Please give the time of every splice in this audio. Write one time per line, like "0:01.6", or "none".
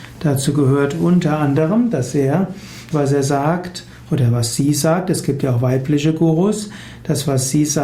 0:02.9